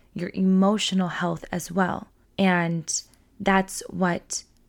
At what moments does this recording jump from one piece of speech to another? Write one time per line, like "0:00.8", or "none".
0:02.2